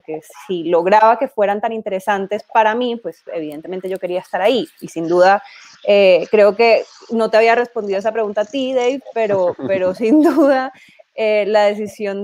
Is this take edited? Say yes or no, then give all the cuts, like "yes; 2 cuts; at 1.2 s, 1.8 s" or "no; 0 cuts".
no; 0 cuts